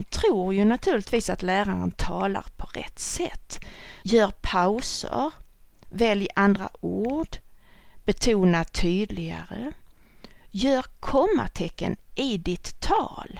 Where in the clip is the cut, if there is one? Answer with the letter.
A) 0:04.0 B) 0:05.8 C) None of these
A